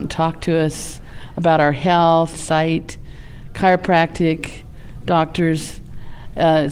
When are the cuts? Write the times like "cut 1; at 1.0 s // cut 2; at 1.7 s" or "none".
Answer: cut 1; at 2.3 s